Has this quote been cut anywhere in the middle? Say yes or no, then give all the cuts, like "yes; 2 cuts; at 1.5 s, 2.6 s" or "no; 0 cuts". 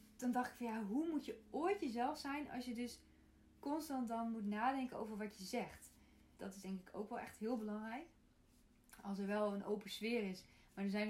yes; 1 cut; at 6.4 s